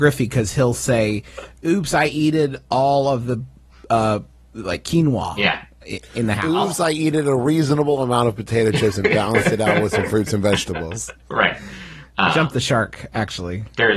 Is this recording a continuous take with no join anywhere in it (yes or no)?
yes